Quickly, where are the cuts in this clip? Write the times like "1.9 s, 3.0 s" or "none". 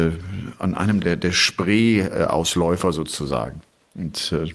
1.0 s